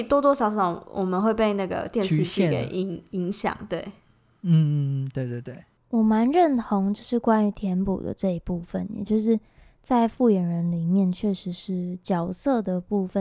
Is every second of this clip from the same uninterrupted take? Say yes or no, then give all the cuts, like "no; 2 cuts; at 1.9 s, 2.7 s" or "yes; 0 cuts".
yes; 0 cuts